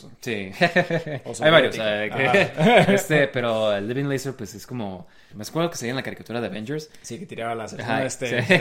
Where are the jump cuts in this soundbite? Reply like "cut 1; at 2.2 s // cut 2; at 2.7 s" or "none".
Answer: cut 1; at 5.3 s